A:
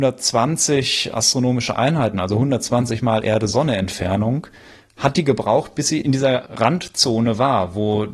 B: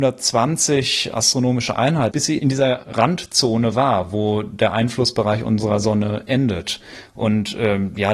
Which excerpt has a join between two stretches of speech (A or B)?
B